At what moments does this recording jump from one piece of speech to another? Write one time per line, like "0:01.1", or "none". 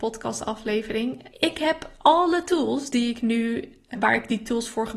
0:01.3
0:03.9